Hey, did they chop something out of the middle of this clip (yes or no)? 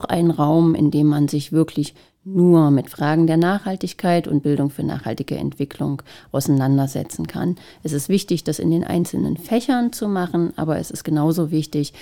no